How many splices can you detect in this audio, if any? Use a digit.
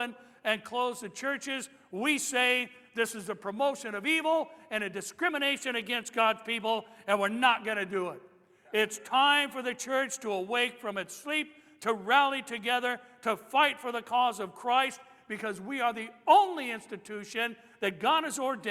0